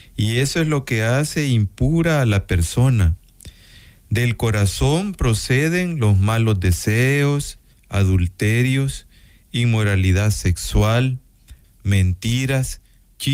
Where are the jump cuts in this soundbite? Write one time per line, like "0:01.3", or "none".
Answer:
0:07.7
0:11.6